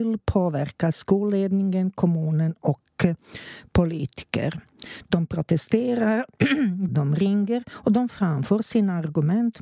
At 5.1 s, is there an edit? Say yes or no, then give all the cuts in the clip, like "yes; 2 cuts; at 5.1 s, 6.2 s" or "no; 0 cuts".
no; 1 cut; at 6.9 s